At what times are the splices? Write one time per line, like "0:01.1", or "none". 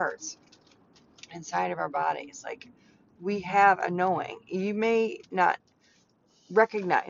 none